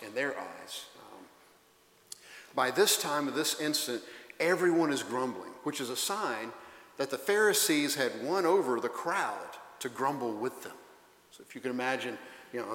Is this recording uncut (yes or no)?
yes